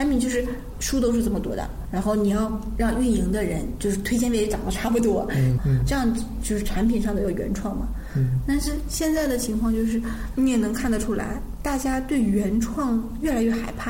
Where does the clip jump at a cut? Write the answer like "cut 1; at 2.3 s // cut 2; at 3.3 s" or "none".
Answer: cut 1; at 5.6 s